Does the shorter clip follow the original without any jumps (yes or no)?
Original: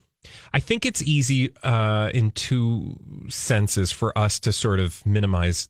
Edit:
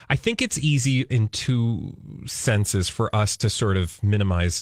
no